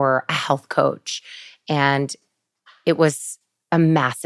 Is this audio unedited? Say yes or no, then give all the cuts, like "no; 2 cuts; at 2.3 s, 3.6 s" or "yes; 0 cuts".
yes; 0 cuts